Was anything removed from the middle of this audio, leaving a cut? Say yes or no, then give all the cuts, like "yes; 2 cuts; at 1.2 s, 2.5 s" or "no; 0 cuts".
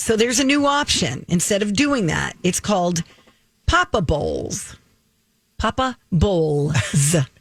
no; 0 cuts